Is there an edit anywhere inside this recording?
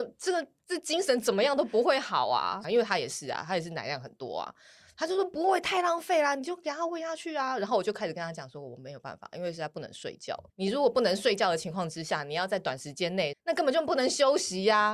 yes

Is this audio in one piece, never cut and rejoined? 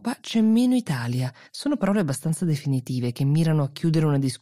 no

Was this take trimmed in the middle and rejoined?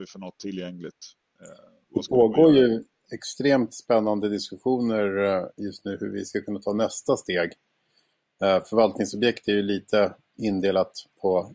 no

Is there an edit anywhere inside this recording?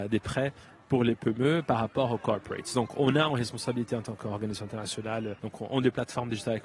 yes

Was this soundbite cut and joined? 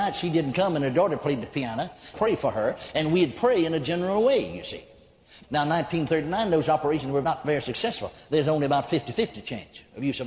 yes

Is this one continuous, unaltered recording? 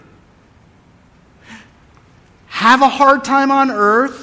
yes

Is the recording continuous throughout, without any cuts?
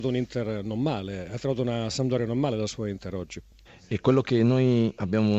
no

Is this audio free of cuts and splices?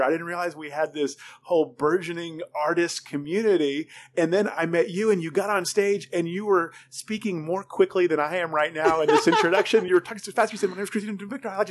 yes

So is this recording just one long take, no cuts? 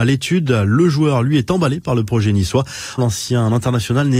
no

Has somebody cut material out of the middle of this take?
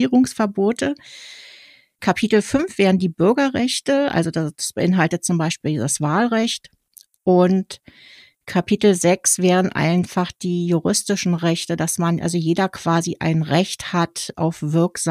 yes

